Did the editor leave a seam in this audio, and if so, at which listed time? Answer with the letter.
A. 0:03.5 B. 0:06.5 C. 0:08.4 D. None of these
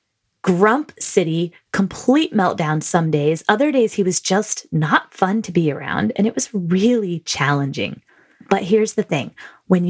D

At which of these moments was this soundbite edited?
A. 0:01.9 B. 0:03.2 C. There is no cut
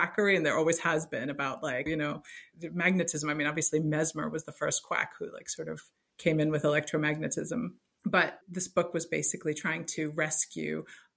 A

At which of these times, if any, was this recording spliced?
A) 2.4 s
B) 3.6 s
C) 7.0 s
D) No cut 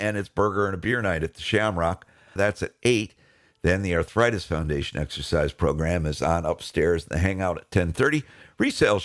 A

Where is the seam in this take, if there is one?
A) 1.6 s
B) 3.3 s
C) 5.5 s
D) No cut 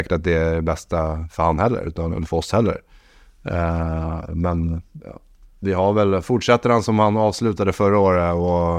D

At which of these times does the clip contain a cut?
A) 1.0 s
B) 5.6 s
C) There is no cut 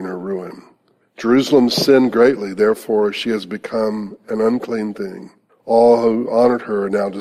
C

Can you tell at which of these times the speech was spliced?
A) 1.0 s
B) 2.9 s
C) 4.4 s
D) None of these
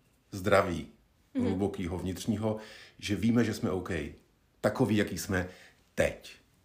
D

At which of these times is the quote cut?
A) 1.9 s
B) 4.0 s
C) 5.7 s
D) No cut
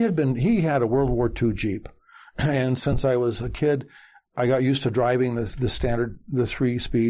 D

